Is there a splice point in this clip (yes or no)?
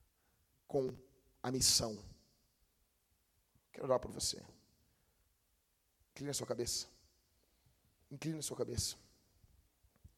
no